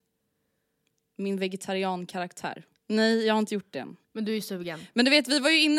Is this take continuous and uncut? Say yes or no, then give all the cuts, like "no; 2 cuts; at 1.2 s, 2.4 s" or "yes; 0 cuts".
no; 1 cut; at 2.8 s